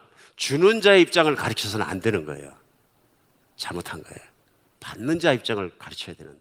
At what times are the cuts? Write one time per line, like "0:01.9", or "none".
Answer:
0:04.8